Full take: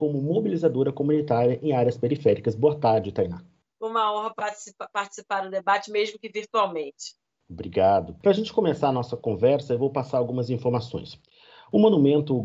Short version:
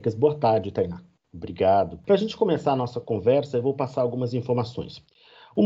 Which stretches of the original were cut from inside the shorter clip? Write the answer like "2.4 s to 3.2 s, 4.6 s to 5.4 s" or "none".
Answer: 3.6 s to 7.3 s

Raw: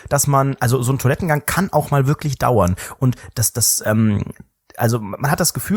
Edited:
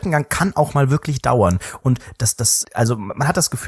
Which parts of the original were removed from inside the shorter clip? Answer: 3.8 s to 4.7 s

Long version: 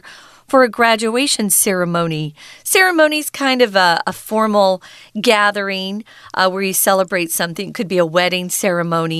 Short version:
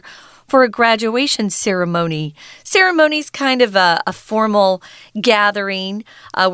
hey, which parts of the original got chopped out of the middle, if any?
none

